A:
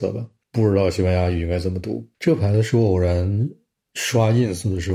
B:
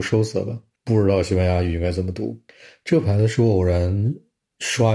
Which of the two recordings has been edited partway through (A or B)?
A